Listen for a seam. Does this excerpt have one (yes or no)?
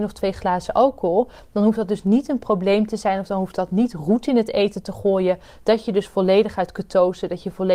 no